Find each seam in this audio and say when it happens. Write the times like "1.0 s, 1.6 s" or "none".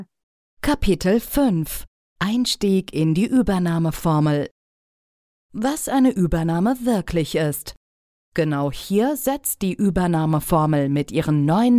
8.2 s